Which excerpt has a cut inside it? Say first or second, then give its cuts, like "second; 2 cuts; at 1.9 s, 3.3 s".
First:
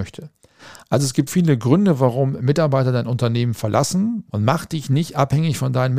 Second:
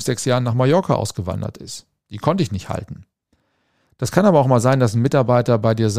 first; 2 cuts; at 1.3 s, 4.3 s